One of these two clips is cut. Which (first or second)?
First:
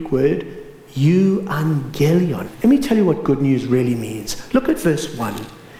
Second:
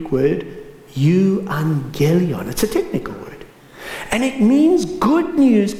first